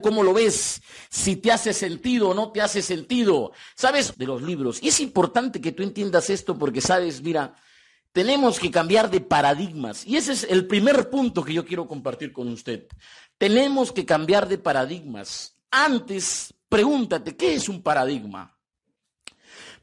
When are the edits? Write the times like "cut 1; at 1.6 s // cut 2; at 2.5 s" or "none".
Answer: cut 1; at 4.1 s

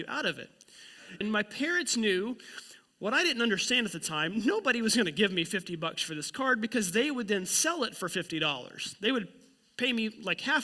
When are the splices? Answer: cut 1; at 1.2 s

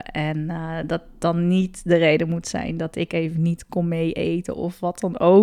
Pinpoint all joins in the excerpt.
none

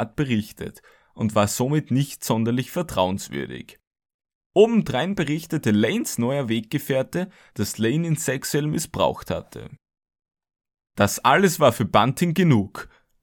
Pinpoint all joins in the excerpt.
cut 1; at 7.5 s

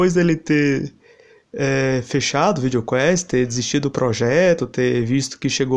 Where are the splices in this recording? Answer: none

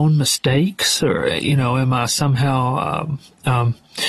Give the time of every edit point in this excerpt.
none

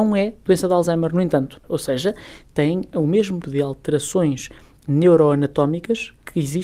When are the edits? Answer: cut 1; at 1.6 s // cut 2; at 3.4 s

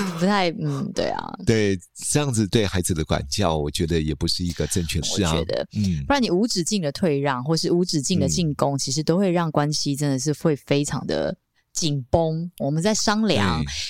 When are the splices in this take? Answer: cut 1; at 5.0 s // cut 2; at 12.6 s

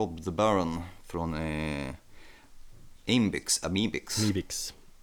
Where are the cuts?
none

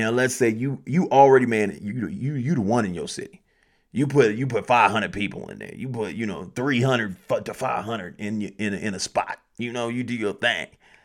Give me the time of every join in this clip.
none

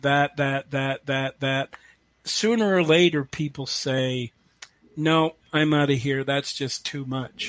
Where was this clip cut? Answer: cut 1; at 1.4 s

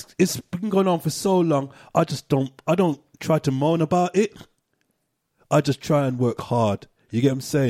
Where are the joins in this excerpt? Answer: none

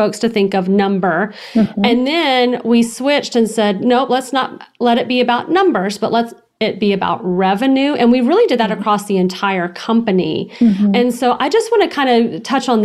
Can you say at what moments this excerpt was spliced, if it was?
none

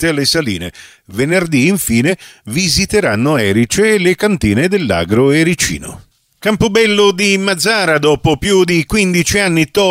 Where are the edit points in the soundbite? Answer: none

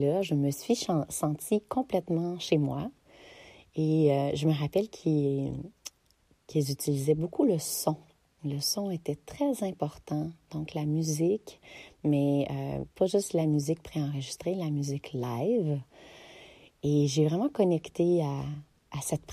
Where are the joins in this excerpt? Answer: none

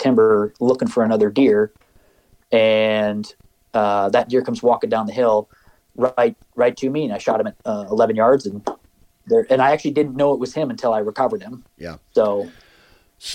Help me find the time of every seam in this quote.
cut 1; at 11.7 s

